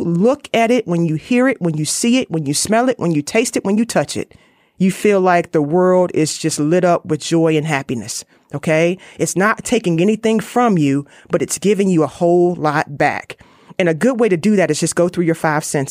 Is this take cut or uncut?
uncut